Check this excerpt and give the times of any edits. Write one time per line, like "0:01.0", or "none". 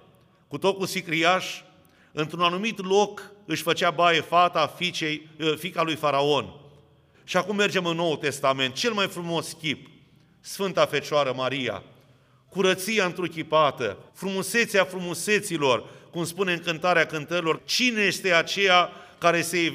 0:07.1
0:14.1
0:17.6